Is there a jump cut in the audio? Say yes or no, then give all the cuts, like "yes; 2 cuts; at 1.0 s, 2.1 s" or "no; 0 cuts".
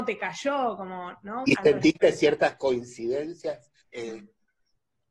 yes; 2 cuts; at 1.4 s, 3.8 s